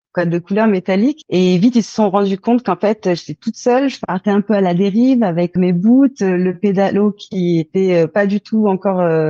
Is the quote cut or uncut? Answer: cut